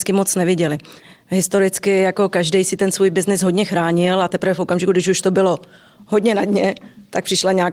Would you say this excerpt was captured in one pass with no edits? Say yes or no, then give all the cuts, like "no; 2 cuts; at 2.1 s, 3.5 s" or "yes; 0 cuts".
yes; 0 cuts